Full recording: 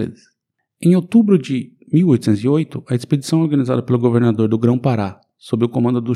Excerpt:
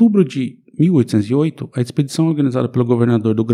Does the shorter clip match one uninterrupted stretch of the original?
yes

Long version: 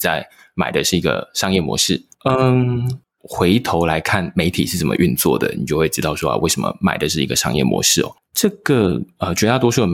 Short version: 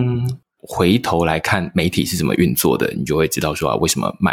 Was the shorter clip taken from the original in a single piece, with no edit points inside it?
yes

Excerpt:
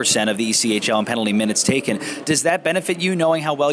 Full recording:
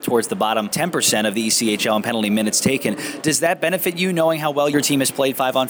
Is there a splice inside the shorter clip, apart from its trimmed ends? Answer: no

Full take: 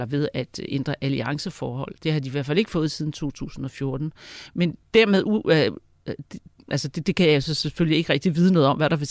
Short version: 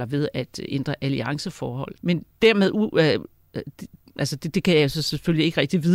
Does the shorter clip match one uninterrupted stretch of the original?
no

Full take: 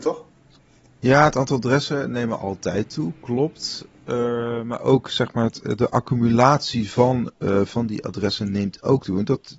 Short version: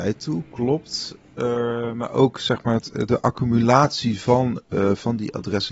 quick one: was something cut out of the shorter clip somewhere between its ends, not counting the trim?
no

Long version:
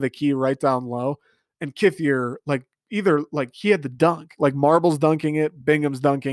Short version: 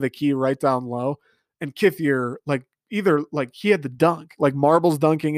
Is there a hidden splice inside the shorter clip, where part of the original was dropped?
no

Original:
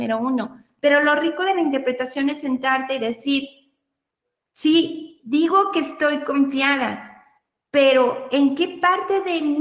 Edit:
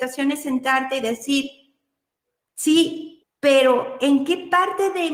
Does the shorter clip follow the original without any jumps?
no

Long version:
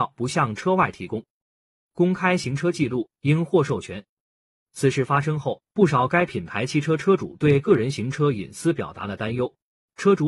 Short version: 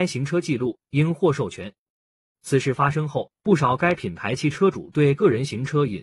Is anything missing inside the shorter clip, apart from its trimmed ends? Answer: yes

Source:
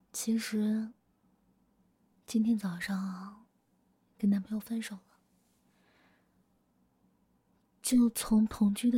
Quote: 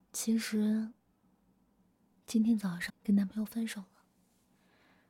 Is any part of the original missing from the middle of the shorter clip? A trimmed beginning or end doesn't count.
yes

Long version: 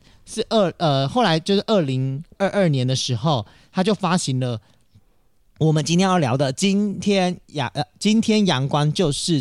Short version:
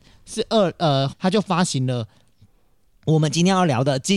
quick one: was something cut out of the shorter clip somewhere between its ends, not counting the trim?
yes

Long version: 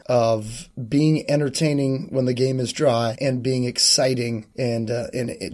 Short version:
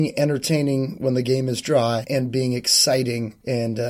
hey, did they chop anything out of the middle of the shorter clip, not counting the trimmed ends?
no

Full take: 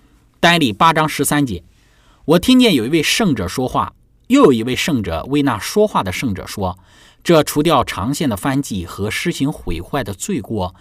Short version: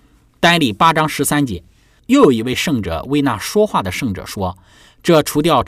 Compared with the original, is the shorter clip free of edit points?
no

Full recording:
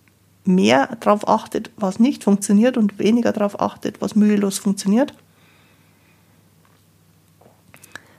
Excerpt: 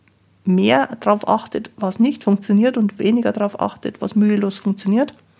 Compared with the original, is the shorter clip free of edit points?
yes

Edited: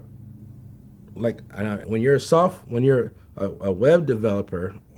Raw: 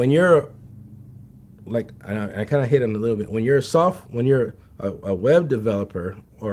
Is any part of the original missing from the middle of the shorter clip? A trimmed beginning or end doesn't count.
yes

